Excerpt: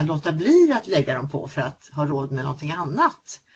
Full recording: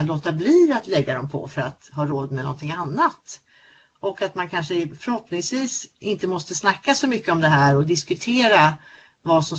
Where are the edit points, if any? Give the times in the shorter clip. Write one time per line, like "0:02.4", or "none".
none